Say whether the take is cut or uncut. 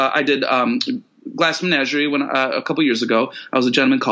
uncut